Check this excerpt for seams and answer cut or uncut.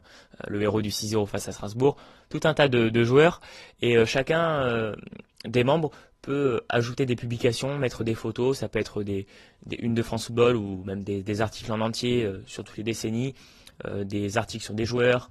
uncut